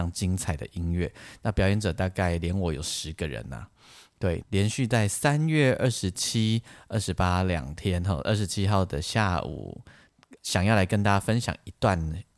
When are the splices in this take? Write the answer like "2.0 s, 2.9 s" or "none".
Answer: 4.4 s, 10.4 s